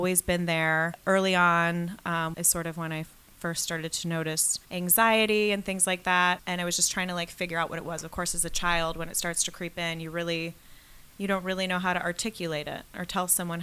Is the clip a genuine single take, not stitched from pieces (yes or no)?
no